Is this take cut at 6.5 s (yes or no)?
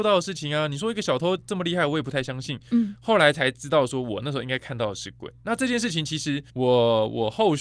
yes